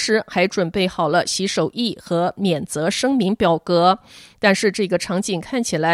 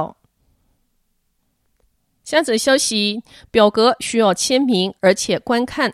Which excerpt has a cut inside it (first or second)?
second